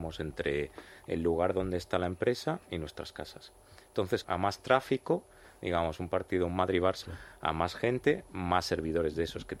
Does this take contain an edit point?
yes; 2 cuts; at 4.2 s, 7.0 s

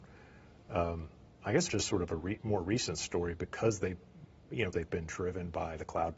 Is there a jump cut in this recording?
yes; 2 cuts; at 1.7 s, 4.7 s

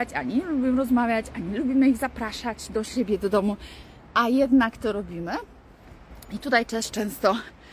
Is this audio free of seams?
yes; 0 cuts

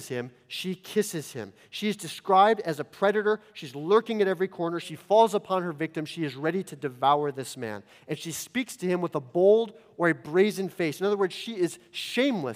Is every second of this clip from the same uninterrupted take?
no; 1 cut; at 4.8 s

